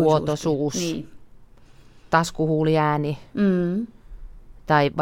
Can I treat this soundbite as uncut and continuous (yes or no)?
yes